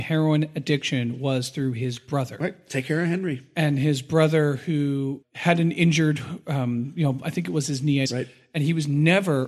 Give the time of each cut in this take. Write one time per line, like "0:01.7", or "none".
0:05.2
0:08.1